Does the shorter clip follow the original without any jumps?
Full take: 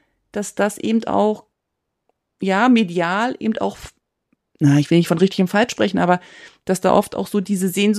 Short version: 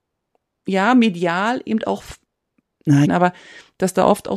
no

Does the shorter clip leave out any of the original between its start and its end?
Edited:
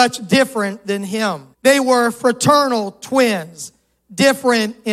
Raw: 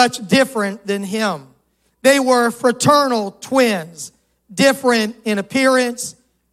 yes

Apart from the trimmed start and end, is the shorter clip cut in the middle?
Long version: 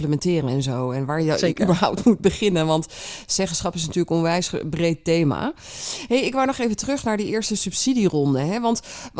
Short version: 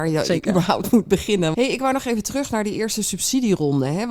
yes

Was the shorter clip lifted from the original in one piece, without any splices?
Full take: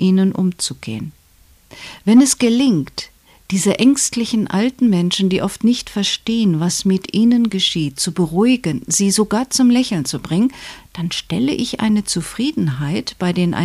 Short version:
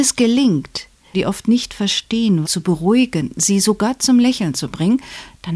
no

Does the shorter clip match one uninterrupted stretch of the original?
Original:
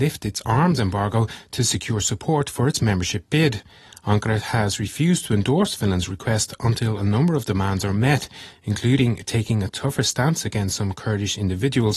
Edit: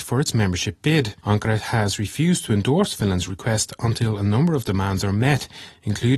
no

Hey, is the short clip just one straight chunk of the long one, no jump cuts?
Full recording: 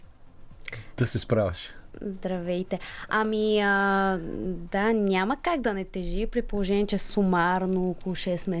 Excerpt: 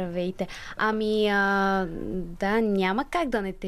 yes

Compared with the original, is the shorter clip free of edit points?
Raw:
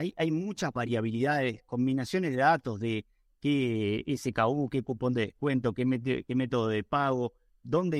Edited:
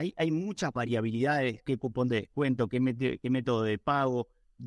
no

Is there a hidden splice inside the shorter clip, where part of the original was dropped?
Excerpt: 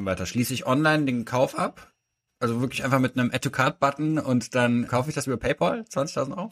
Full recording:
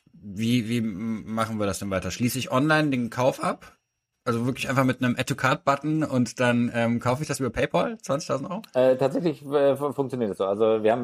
yes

